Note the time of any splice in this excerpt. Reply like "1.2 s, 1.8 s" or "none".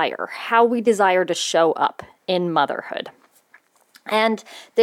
none